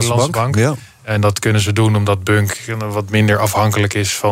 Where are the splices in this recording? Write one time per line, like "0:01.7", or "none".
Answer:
none